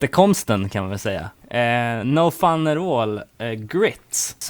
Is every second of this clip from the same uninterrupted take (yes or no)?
no